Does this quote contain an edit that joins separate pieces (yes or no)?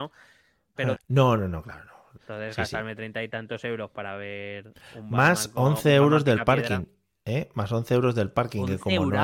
yes